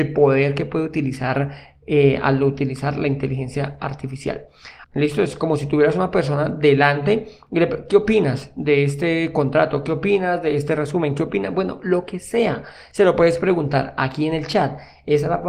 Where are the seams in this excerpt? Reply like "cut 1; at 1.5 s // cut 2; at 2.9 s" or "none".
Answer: cut 1; at 4.8 s